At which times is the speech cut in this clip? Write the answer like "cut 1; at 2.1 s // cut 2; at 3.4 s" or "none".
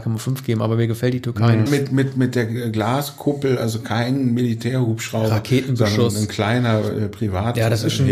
cut 1; at 1.7 s

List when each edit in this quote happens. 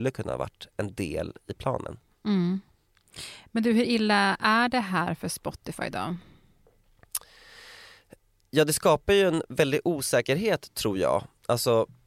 none

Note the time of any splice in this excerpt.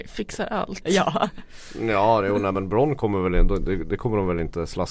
none

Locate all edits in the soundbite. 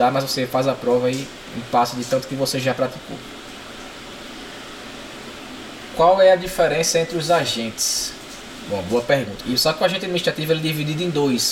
cut 1; at 9.4 s

